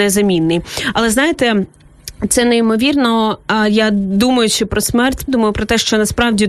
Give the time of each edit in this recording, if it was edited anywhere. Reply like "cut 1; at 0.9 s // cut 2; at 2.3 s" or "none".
cut 1; at 5.3 s